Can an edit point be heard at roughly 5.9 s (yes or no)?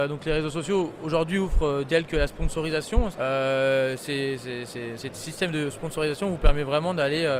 no